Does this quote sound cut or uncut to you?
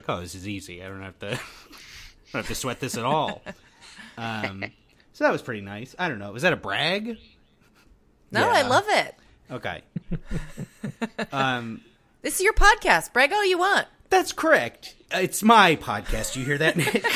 uncut